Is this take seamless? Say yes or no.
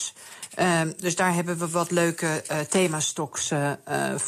yes